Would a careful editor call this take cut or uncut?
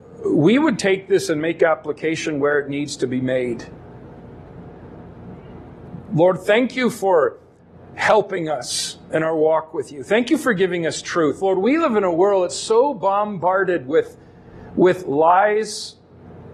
uncut